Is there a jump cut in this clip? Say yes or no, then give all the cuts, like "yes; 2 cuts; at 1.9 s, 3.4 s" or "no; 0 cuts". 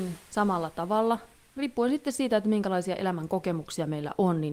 no; 0 cuts